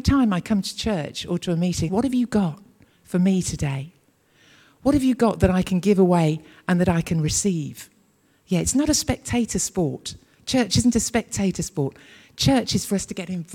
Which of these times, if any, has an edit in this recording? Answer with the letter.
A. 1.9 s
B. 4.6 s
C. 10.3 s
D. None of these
A